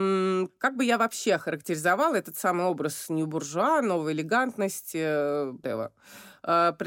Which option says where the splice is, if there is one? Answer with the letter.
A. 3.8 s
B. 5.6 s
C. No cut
B